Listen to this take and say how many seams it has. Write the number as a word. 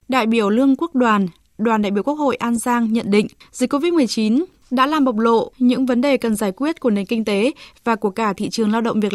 zero